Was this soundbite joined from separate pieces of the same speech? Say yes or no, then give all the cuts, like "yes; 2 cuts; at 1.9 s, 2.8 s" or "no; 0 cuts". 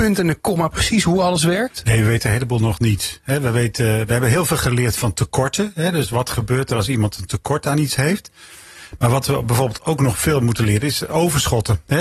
no; 0 cuts